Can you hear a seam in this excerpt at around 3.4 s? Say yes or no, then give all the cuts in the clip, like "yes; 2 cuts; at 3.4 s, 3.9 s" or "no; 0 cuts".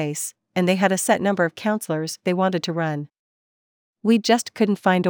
no; 0 cuts